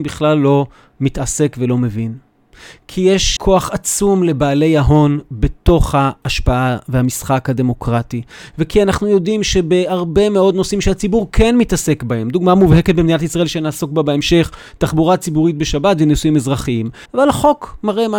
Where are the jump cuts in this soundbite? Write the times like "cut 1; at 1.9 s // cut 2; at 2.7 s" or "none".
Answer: cut 1; at 3.4 s // cut 2; at 17.1 s